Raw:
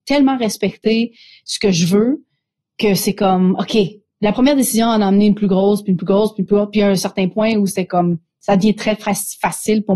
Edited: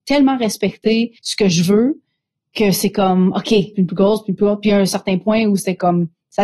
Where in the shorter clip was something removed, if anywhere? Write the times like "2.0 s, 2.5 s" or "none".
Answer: 1.2 s, 3.7 s